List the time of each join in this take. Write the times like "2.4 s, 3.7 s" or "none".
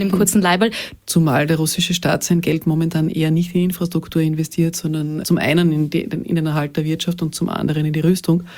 1.0 s